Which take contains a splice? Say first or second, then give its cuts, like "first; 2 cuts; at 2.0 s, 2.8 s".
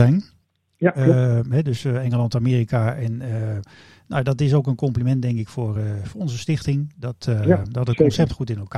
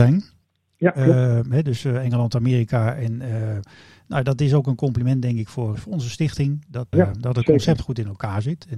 second; 2 cuts; at 5.7 s, 6.9 s